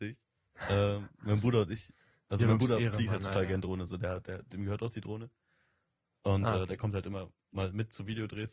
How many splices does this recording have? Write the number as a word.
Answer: zero